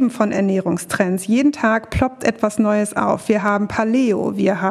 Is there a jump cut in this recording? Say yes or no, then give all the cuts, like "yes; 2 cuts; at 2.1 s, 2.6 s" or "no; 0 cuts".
no; 0 cuts